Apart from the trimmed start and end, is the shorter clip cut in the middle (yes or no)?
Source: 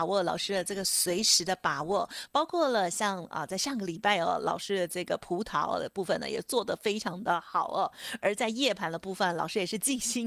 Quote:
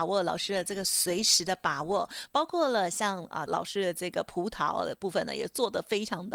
yes